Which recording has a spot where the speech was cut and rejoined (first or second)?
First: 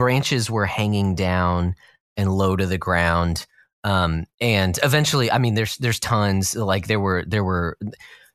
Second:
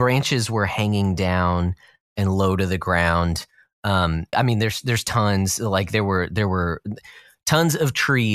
second